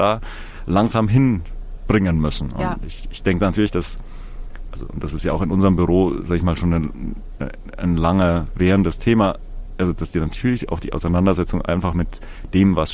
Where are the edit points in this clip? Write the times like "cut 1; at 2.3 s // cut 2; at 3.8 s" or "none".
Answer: none